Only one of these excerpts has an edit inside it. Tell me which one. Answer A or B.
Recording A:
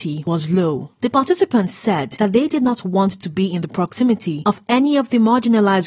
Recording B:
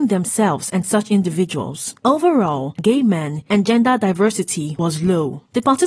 B